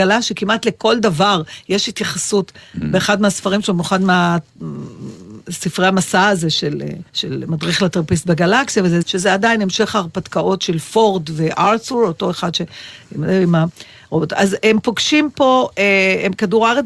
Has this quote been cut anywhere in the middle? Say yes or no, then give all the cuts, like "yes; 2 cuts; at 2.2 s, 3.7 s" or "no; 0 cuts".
yes; 2 cuts; at 7.1 s, 9.0 s